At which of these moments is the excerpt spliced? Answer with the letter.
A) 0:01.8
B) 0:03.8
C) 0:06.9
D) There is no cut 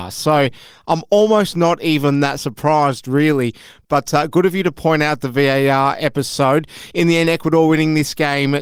D